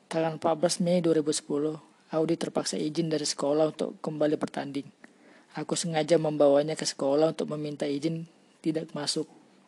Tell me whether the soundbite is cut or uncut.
uncut